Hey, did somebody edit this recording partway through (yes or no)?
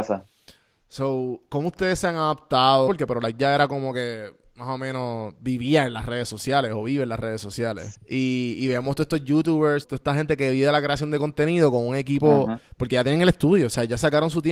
yes